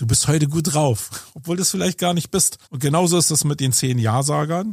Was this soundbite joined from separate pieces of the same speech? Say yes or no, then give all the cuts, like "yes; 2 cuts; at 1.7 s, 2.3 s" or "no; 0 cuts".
yes; 1 cut; at 2.6 s